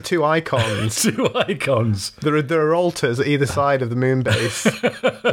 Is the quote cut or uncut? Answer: uncut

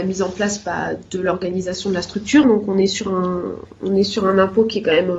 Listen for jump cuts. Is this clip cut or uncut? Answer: cut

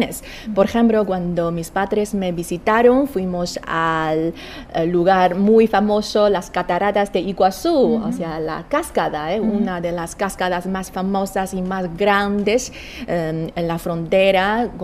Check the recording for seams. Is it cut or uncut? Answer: uncut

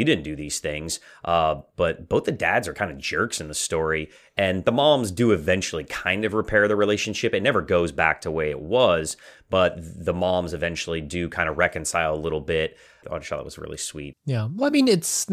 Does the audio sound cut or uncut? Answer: cut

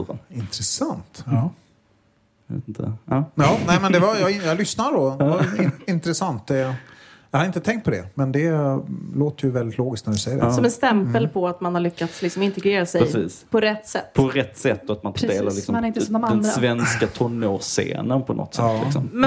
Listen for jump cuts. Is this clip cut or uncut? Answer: uncut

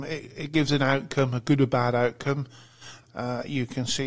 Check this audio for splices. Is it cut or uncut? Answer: cut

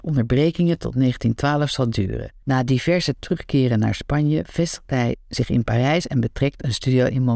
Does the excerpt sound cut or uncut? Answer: cut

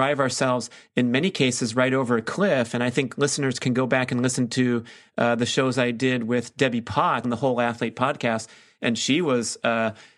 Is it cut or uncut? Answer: cut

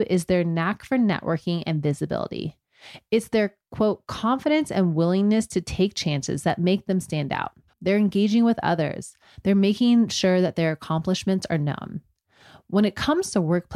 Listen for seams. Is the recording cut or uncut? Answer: cut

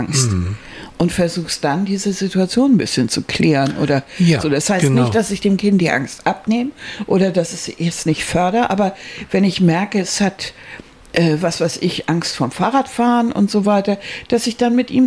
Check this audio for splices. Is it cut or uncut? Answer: cut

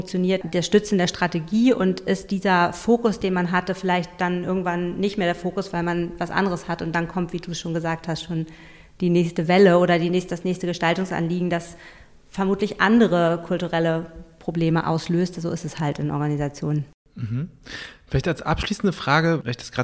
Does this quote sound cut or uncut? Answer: uncut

